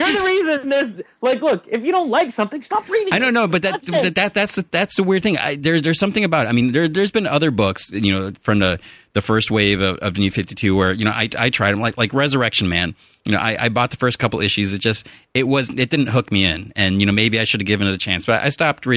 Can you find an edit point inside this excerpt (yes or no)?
no